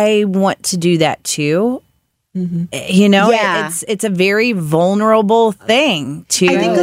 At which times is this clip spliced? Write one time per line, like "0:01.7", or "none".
0:02.3